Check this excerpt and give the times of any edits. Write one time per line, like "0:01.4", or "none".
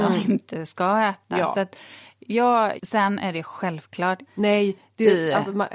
0:02.8
0:04.3